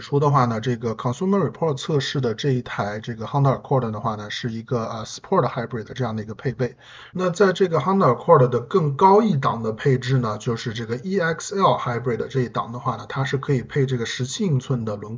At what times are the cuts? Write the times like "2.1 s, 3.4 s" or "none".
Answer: 7.1 s